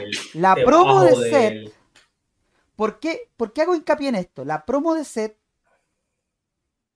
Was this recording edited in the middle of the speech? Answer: no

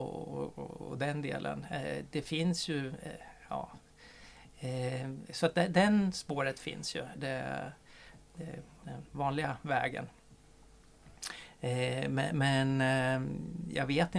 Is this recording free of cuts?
no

